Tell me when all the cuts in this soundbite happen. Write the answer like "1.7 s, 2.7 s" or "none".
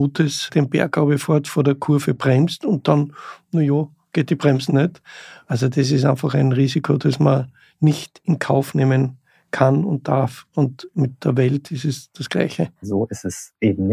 4.7 s, 12.8 s